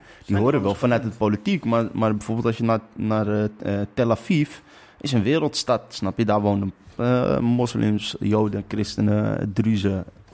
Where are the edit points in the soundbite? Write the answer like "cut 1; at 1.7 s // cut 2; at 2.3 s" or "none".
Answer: none